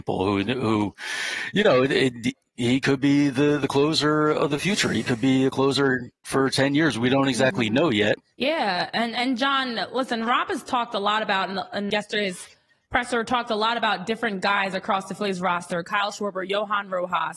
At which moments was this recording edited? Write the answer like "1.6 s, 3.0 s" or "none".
8.3 s, 11.9 s